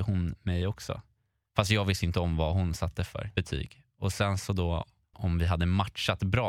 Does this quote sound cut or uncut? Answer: cut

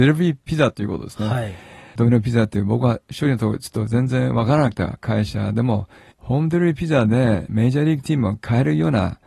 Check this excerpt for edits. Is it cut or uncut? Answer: uncut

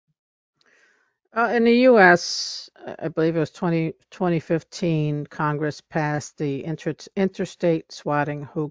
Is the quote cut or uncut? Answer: uncut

